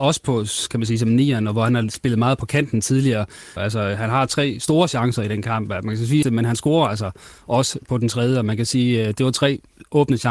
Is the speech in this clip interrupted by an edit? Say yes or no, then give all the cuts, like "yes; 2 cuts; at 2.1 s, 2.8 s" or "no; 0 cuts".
yes; 2 cuts; at 3.6 s, 6.2 s